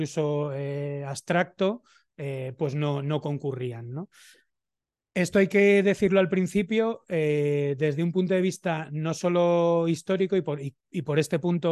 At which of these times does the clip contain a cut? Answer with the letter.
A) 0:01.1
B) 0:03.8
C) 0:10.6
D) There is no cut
D